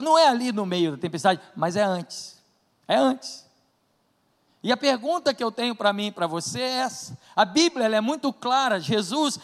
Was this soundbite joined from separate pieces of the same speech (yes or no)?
no